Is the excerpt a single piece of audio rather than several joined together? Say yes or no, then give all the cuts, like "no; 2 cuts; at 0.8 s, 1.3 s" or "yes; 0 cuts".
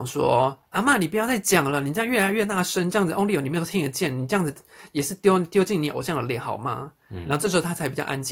yes; 0 cuts